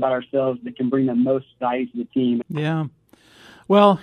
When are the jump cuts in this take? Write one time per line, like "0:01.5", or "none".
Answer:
0:02.4